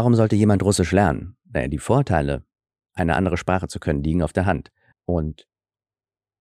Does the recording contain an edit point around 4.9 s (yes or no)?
yes